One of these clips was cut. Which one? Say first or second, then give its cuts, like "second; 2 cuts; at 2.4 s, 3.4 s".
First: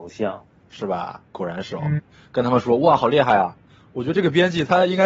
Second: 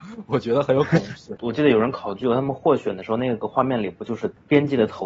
first; 1 cut; at 2.0 s